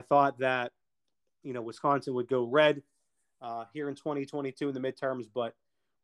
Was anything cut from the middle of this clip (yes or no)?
no